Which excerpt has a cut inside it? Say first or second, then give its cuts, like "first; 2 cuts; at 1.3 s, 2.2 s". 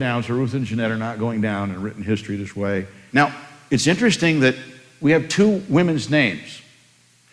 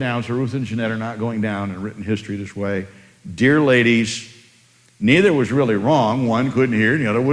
first; 1 cut; at 3.1 s